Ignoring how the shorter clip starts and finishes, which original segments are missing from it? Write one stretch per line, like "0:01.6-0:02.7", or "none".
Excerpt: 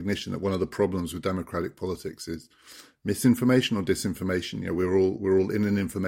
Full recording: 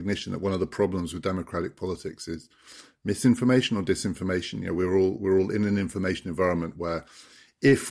none